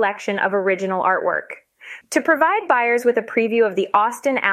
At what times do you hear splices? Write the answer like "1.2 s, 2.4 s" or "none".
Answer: 2.0 s